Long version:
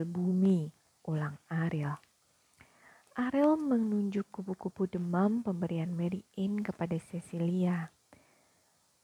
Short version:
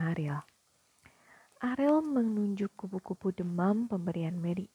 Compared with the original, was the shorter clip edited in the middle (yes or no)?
no